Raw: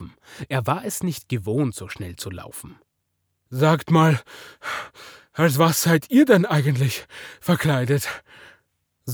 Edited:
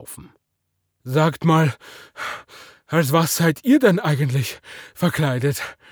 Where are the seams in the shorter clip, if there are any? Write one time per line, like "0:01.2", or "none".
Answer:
none

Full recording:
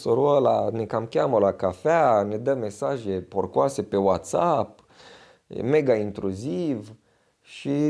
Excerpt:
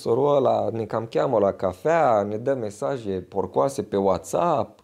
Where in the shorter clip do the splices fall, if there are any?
none

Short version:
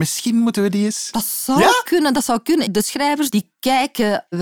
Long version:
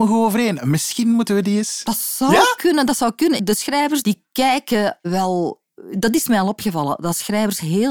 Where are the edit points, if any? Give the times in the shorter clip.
none

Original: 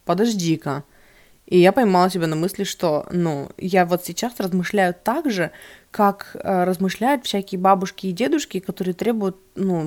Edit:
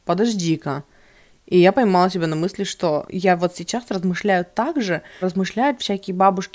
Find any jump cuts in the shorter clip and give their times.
0:03.0
0:05.2

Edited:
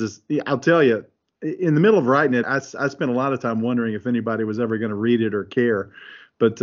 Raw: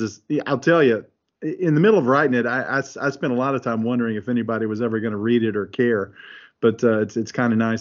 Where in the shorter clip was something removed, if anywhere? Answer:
0:02.4

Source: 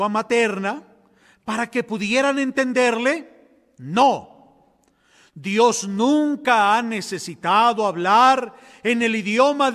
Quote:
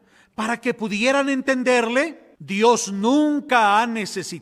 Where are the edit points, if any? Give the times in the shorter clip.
0:02.4

